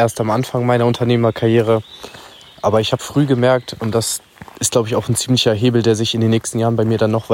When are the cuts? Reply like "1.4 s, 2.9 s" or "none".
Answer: 3.0 s

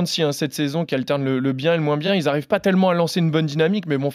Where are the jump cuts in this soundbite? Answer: none

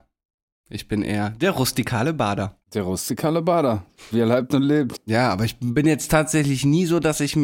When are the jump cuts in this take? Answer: 2.6 s, 5.0 s

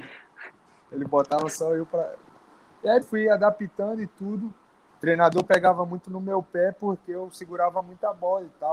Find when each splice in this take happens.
3.0 s, 4.9 s

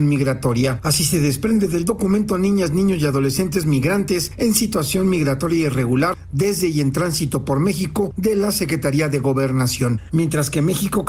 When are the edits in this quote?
10.1 s

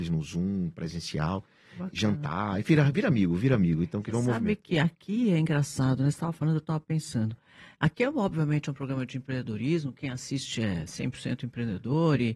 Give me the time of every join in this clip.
none

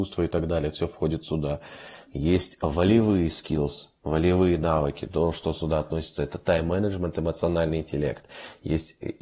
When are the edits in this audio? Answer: none

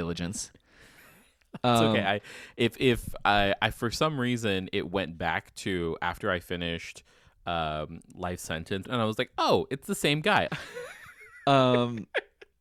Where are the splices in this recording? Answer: 8.8 s, 10.5 s

